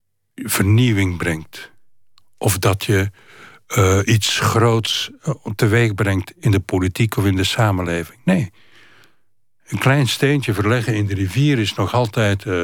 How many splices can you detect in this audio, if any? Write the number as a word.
zero